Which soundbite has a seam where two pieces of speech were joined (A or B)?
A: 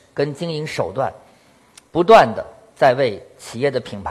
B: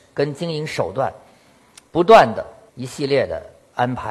B